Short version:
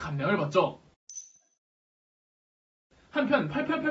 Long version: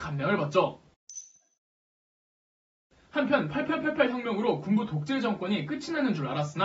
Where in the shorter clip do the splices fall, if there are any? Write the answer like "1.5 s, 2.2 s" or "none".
none